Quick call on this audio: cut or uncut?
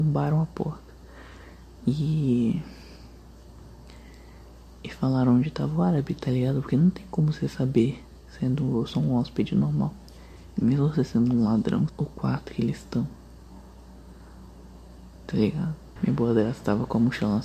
cut